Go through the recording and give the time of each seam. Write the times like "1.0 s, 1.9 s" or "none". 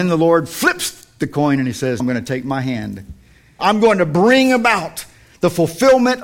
2.0 s, 3.6 s